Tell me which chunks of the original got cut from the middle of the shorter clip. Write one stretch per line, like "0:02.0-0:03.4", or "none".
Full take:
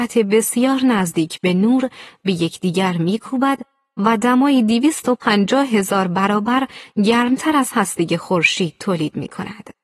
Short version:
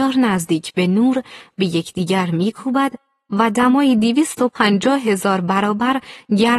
none